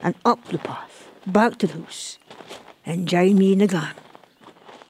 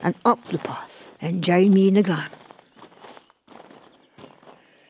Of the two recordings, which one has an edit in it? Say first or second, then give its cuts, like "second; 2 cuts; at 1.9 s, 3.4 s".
second; 1 cut; at 1.2 s